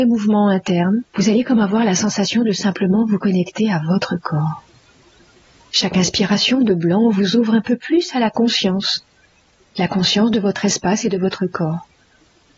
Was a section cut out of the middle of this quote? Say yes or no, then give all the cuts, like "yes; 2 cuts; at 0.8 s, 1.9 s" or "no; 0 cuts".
yes; 1 cut; at 1.1 s